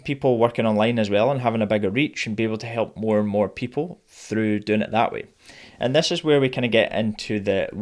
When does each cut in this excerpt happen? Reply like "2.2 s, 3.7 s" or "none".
none